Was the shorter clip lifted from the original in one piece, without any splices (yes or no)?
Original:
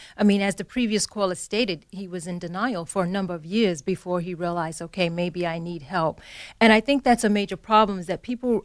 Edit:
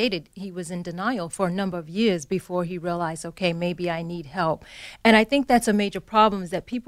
yes